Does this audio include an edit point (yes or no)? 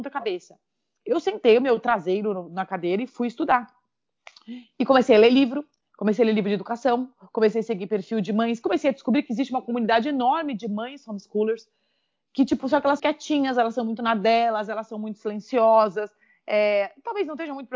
yes